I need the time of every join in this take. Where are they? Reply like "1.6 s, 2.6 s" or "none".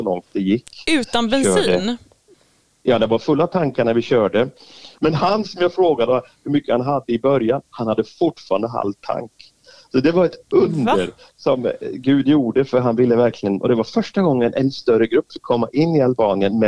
5.0 s